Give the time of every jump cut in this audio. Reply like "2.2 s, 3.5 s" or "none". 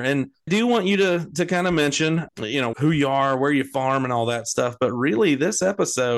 2.7 s